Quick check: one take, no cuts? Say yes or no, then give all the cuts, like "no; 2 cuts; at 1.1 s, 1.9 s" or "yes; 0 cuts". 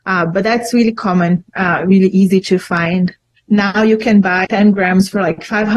no; 2 cuts; at 3.4 s, 4.4 s